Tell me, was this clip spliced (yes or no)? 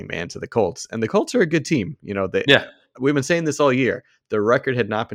no